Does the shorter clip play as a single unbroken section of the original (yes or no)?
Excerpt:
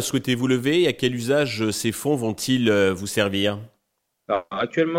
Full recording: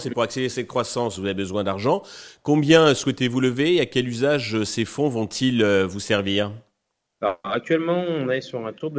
yes